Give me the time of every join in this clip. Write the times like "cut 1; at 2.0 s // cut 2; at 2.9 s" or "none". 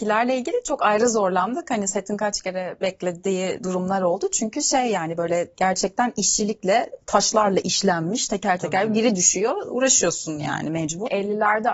none